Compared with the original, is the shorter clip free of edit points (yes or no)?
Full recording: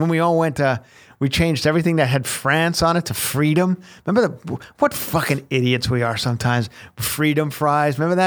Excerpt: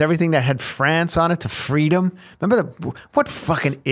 yes